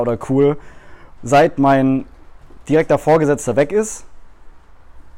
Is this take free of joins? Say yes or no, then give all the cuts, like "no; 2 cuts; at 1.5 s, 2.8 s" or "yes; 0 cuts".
no; 1 cut; at 1.2 s